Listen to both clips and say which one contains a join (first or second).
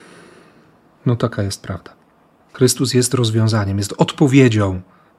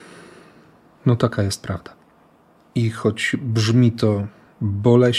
first